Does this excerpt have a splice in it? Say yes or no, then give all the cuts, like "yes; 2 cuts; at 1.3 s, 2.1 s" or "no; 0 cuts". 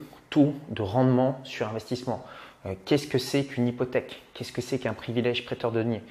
no; 0 cuts